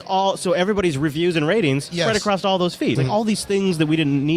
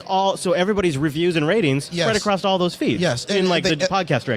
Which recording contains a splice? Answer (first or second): first